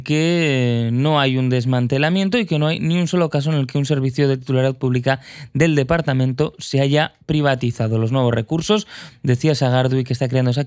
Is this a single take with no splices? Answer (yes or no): yes